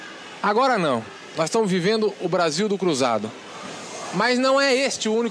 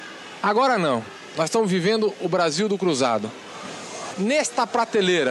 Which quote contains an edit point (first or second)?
second